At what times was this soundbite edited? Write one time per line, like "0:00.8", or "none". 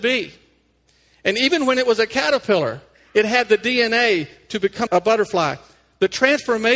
0:04.9